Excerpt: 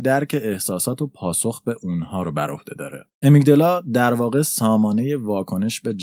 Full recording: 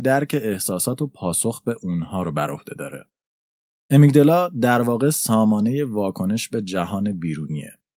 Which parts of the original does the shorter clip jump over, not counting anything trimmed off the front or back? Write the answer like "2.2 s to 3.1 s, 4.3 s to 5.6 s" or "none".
3.1 s to 3.8 s